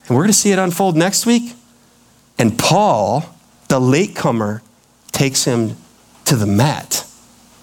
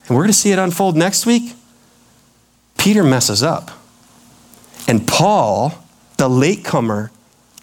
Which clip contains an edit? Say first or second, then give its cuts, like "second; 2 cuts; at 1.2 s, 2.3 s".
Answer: first; 1 cut; at 2.4 s